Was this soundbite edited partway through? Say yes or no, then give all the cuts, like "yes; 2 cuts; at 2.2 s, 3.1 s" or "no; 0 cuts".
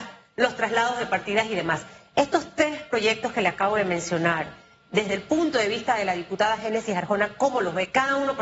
no; 0 cuts